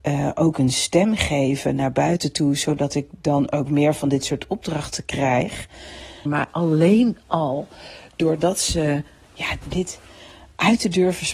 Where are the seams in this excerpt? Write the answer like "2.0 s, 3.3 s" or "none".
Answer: 6.3 s, 9.6 s